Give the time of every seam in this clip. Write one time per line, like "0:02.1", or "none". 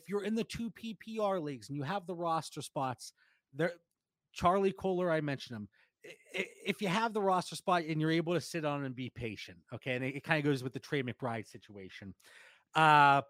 0:10.0